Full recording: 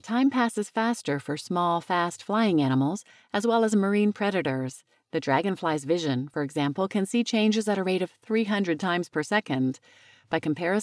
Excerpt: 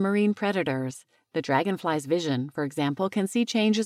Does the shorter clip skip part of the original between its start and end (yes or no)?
no